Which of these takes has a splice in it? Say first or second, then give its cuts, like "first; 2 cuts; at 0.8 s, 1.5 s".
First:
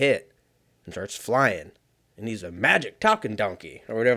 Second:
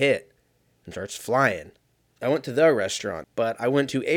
second; 2 cuts; at 2.1 s, 3.2 s